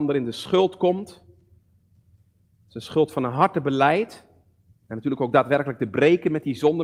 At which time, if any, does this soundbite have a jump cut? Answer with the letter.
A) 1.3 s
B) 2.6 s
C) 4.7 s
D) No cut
C